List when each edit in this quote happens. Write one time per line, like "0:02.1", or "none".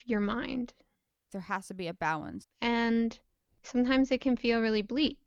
0:01.3
0:02.4